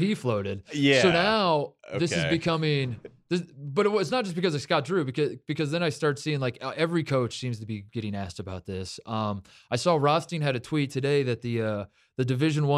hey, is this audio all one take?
yes; 0 cuts

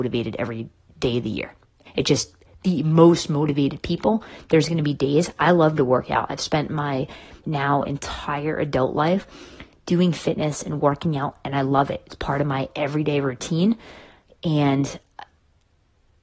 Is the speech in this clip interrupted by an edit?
yes; 2 cuts; at 1.9 s, 7.4 s

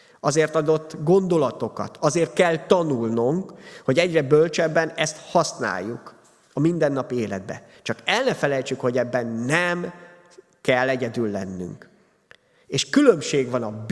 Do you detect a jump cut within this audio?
no; 0 cuts

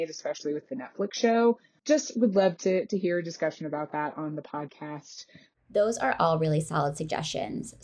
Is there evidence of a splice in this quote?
no; 0 cuts

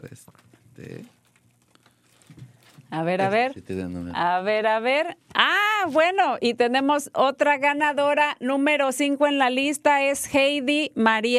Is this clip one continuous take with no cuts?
yes; 0 cuts

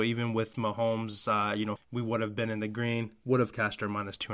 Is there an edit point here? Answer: yes; 1 cut; at 1.8 s

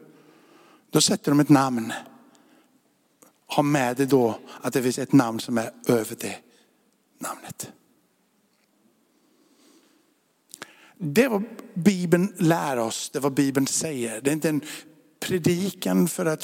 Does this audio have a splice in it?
no; 0 cuts

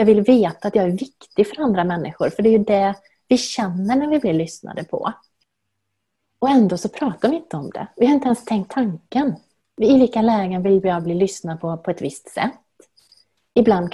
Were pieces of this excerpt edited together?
no; 0 cuts

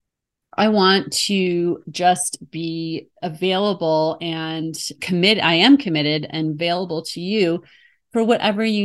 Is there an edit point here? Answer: yes; 1 cut; at 5.0 s

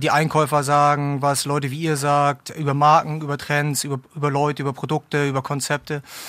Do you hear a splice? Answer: no; 0 cuts

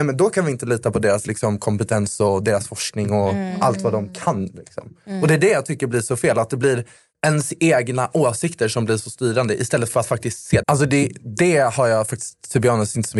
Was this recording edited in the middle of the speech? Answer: yes; 1 cut; at 10.6 s

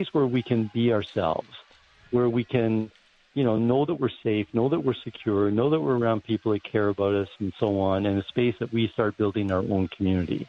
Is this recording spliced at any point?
no; 0 cuts

